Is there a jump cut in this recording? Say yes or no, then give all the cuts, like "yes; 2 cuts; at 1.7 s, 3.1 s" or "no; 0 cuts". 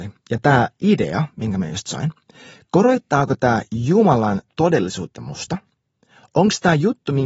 no; 0 cuts